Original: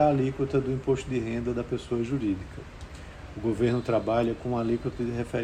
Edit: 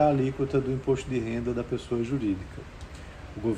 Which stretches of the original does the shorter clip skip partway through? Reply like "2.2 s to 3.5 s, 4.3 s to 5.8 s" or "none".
none